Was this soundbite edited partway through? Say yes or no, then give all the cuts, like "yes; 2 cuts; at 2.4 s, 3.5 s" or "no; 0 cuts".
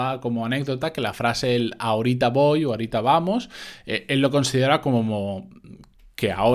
no; 0 cuts